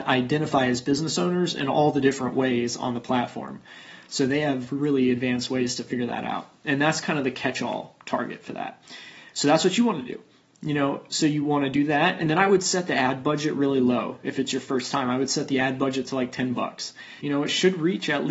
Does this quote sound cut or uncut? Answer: cut